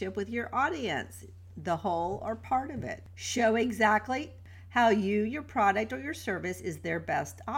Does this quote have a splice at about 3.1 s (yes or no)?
no